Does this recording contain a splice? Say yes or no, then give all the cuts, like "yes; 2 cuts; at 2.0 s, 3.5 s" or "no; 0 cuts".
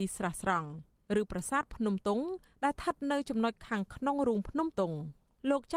yes; 2 cuts; at 2.0 s, 4.7 s